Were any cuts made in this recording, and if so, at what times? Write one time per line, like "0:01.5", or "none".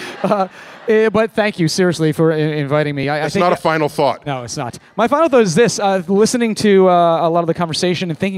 none